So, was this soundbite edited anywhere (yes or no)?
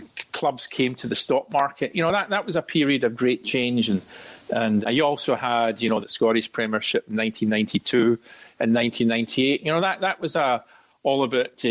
yes